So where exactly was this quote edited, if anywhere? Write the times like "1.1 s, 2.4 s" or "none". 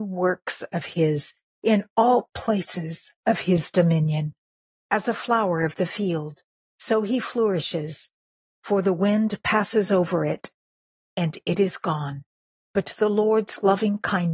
4.8 s, 12.6 s